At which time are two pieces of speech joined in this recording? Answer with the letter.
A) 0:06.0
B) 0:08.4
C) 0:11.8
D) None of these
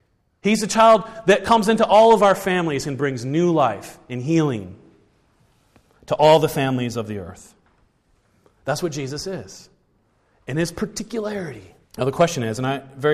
C